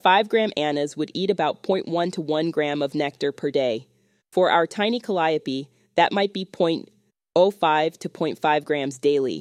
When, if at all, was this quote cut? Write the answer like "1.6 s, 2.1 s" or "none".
none